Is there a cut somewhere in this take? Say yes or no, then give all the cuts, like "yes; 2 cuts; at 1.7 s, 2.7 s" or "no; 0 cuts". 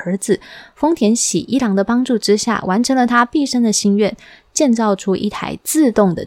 no; 0 cuts